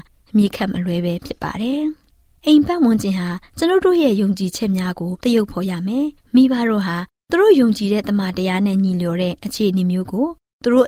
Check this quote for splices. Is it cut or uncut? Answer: uncut